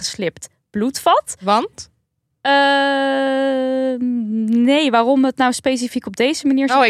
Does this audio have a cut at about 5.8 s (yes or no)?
no